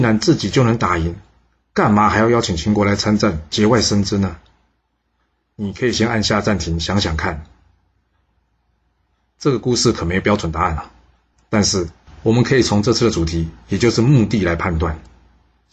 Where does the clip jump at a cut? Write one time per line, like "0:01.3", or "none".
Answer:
none